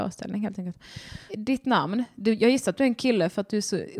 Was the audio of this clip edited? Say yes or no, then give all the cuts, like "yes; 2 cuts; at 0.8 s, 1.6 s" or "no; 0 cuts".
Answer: yes; 1 cut; at 1.3 s